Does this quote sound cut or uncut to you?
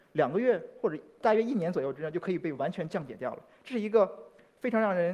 uncut